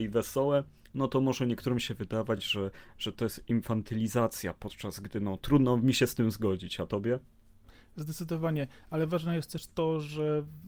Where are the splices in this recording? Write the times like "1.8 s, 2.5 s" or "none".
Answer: none